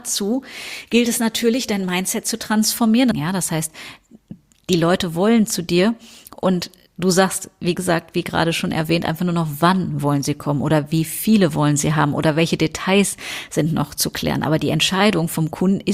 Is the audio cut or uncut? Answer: cut